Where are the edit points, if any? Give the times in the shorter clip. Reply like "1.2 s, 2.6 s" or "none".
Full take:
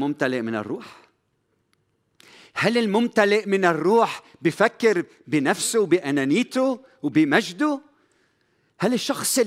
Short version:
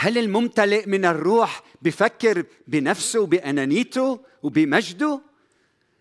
none